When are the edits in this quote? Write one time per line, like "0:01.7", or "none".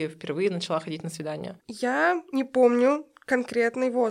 none